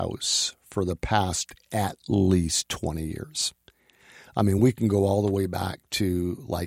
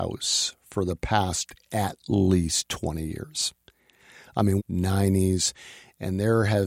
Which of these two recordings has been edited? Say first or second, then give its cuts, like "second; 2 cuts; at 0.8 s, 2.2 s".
second; 1 cut; at 4.6 s